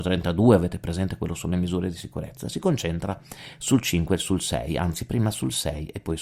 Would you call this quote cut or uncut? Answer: uncut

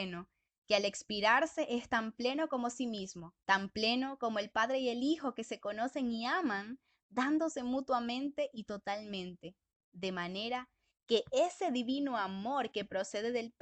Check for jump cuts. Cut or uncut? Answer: cut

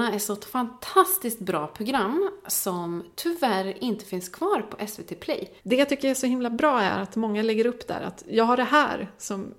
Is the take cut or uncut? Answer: cut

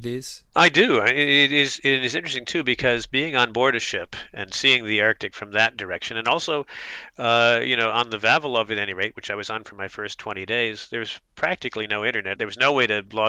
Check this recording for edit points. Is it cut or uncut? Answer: cut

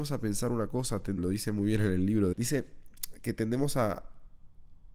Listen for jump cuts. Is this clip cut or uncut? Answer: cut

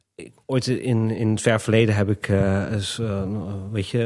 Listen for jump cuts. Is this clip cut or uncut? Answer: uncut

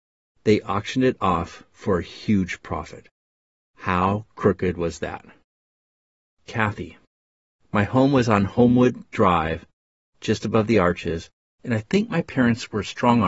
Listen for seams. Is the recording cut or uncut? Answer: uncut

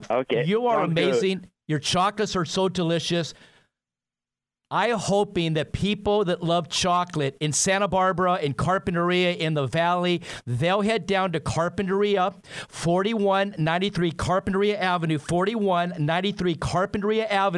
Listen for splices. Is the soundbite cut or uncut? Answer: uncut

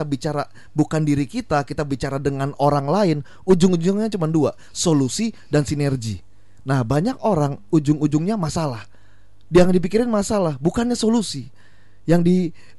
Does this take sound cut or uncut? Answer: uncut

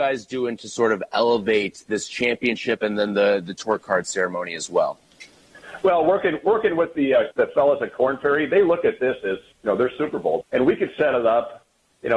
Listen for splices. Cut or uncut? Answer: cut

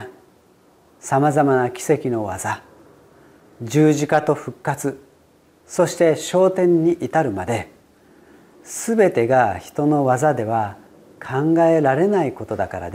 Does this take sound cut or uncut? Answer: uncut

